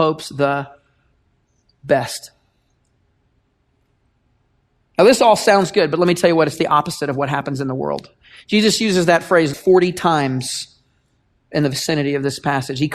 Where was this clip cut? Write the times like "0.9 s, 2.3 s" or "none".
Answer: 9.5 s